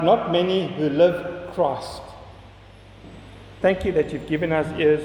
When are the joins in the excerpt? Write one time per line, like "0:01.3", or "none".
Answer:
0:03.6